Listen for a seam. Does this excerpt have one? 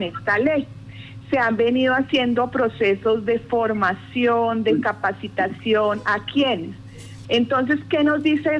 yes; 1 cut; at 7.2 s

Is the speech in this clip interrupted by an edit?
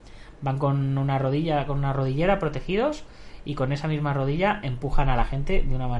no; 0 cuts

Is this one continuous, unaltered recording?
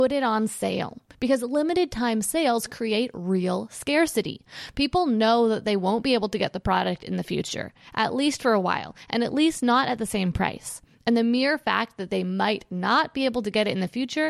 yes; 0 cuts

